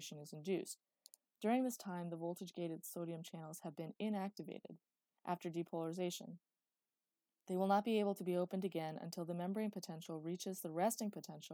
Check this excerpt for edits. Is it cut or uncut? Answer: cut